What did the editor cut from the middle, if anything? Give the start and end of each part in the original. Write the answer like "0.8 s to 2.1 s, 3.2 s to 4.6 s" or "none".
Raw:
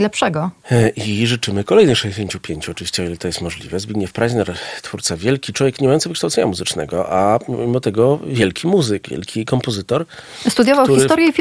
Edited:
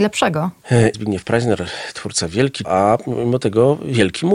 0.9 s to 3.8 s, 5.5 s to 7.1 s